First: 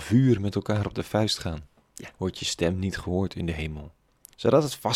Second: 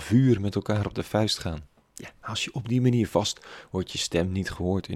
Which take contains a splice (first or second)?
first